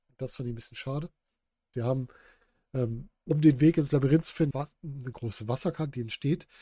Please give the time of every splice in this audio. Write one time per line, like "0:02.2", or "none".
0:01.7
0:04.5